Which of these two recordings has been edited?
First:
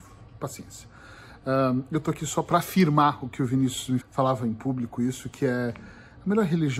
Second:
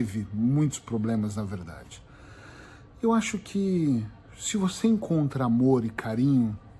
first; 1 cut; at 4.0 s

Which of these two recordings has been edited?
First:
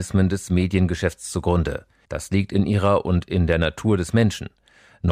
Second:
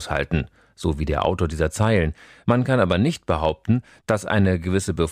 first; 1 cut; at 2.0 s

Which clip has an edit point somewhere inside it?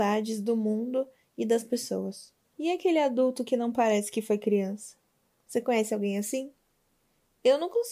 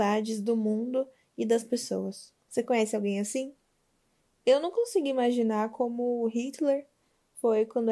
second; 1 cut; at 2.4 s

